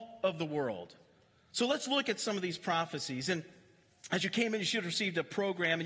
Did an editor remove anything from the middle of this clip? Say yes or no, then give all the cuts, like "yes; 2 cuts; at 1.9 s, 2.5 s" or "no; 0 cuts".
no; 0 cuts